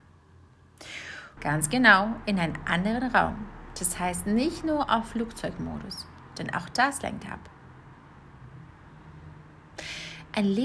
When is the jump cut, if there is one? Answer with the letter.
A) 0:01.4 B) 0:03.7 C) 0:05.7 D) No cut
A